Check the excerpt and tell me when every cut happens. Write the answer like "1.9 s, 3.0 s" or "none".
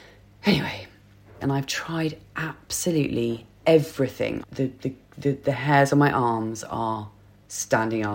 1.4 s, 4.4 s

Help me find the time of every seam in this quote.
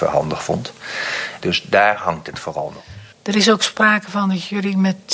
1.4 s, 3.1 s

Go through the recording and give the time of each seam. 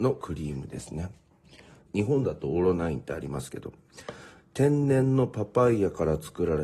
1.9 s, 4.4 s

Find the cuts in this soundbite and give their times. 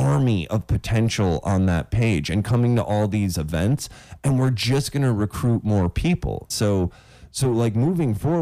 6.5 s

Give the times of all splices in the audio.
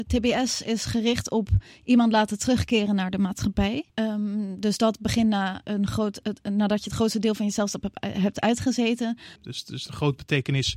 3.9 s, 9.4 s

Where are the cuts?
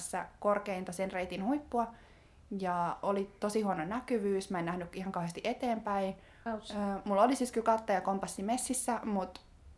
6.5 s

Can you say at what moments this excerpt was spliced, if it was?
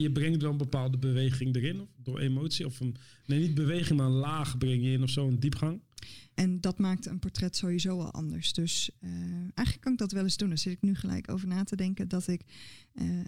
6.4 s

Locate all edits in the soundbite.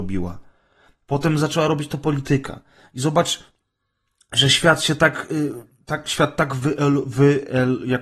none

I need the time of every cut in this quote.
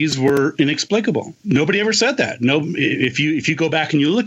1.4 s

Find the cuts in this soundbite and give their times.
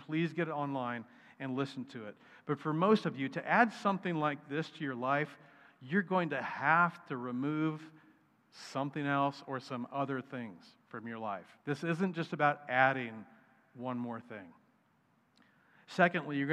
11.6 s

